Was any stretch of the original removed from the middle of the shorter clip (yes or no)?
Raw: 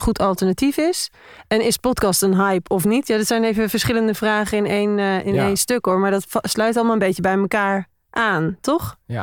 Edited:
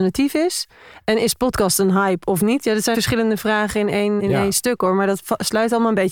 yes